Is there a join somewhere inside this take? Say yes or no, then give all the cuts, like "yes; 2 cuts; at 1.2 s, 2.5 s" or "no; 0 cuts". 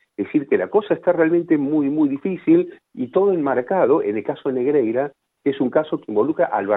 no; 0 cuts